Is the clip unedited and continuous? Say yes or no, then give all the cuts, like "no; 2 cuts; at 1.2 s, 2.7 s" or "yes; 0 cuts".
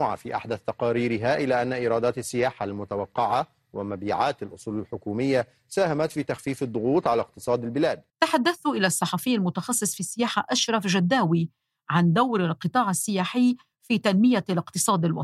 no; 1 cut; at 8.1 s